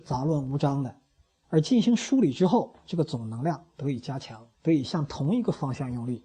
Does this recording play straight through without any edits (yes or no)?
no